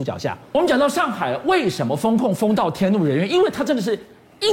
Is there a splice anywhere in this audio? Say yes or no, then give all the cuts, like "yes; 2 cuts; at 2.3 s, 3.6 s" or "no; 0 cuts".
no; 0 cuts